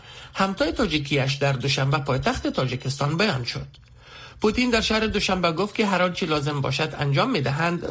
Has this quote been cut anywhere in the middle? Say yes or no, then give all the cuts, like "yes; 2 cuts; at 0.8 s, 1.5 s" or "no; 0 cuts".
no; 0 cuts